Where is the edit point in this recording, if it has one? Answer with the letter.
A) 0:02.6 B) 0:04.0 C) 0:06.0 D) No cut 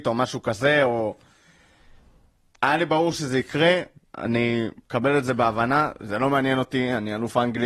D